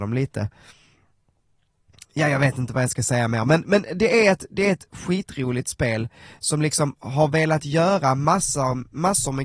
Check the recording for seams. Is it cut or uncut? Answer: uncut